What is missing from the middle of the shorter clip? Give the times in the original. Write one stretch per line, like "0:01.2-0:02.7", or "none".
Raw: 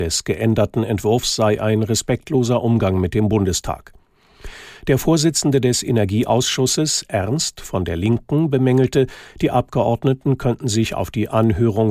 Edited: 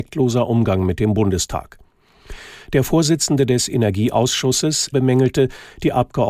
0:07.1-0:08.5